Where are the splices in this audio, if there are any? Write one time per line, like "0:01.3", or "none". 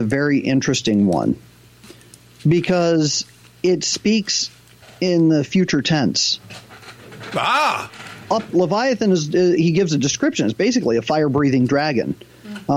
0:08.5
0:09.6